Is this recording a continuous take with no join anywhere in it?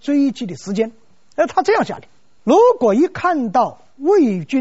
no; 1 cut; at 2.4 s

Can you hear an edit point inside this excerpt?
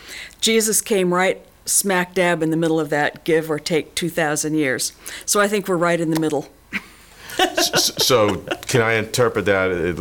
no; 0 cuts

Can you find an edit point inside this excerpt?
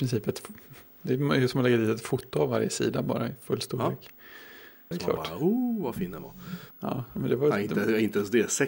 yes; 2 cuts; at 4.9 s, 6.7 s

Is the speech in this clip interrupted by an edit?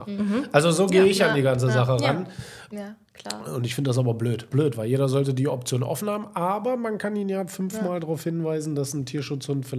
yes; 2 cuts; at 2.7 s, 4.5 s

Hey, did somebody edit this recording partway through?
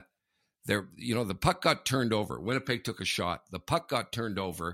no; 0 cuts

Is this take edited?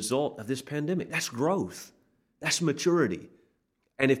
no; 0 cuts

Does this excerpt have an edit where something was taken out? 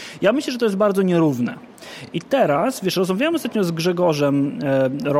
no; 0 cuts

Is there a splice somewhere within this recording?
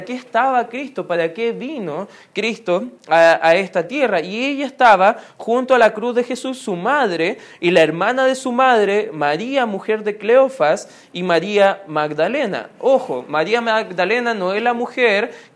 no; 0 cuts

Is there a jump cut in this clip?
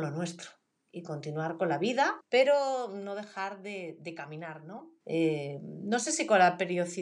yes; 2 cuts; at 2.2 s, 5.0 s

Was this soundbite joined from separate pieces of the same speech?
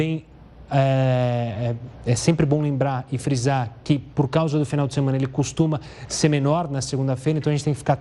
no; 0 cuts

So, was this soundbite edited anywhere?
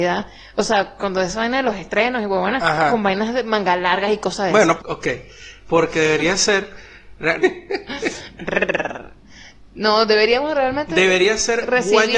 yes; 2 cuts; at 4.8 s, 7.4 s

